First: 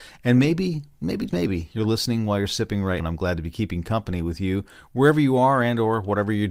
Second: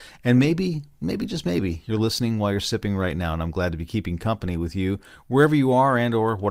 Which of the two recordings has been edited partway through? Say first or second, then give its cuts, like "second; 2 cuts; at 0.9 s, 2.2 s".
first; 2 cuts; at 1.3 s, 3.0 s